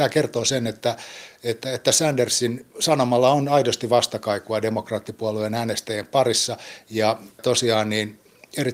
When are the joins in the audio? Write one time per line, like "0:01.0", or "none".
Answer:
0:02.7